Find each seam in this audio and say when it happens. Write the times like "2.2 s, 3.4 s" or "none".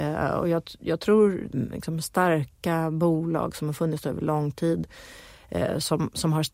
1.5 s